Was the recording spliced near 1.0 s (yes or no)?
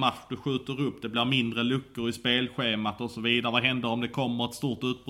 no